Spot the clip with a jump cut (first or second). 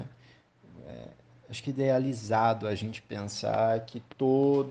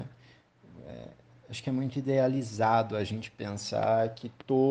first